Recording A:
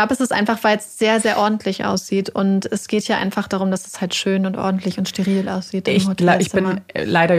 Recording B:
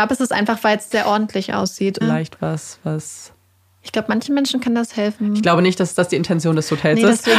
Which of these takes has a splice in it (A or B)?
B